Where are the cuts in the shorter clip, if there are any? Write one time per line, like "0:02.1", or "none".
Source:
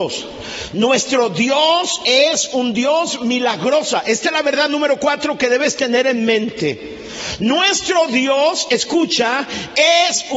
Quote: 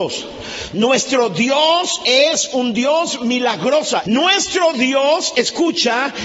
0:04.0